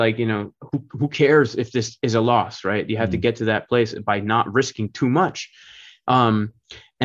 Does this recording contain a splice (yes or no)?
no